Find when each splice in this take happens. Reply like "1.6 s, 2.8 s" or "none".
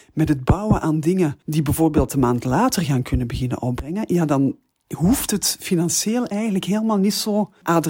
1.4 s